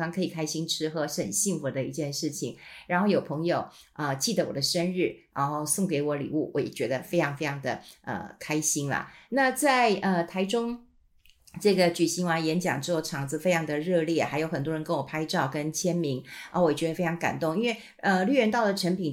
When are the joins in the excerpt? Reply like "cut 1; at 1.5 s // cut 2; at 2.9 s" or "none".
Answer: none

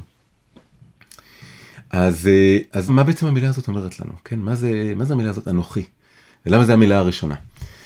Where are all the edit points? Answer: cut 1; at 2.9 s

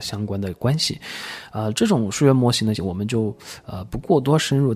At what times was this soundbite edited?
cut 1; at 2.8 s

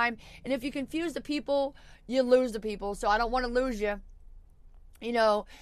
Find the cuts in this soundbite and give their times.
none

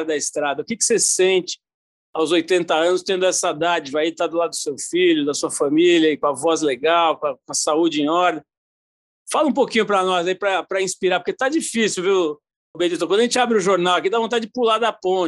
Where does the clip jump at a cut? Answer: cut 1; at 12.7 s

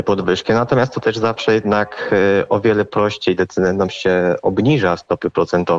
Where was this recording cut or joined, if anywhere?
cut 1; at 1.0 s

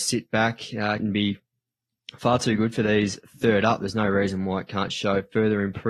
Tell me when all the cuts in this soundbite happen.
cut 1; at 1.0 s

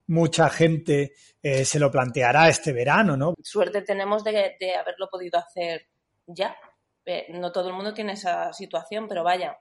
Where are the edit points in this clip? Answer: cut 1; at 3.3 s

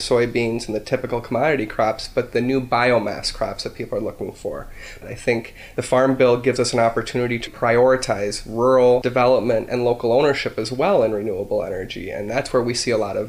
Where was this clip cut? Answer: cut 1; at 5.0 s // cut 2; at 7.5 s

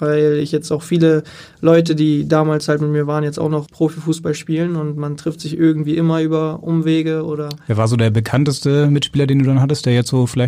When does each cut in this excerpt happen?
cut 1; at 3.7 s

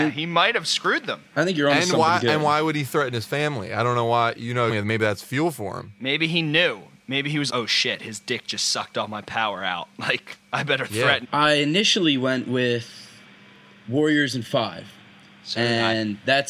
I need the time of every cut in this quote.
cut 1; at 4.7 s // cut 2; at 7.5 s // cut 3; at 11.2 s

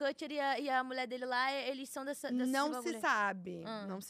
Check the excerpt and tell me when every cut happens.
none

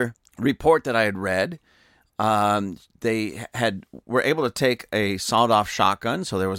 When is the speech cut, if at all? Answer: none

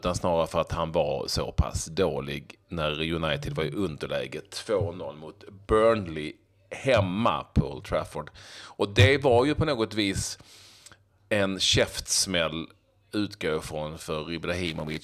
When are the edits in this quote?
none

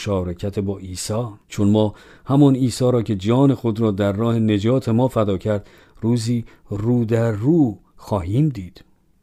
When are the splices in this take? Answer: cut 1; at 1.4 s

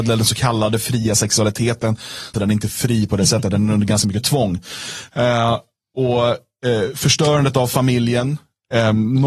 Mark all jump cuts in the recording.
cut 1; at 2.3 s

